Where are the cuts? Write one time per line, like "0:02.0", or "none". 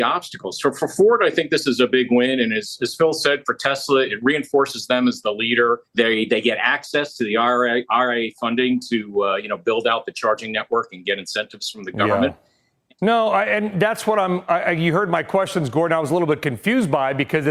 0:05.9
0:13.0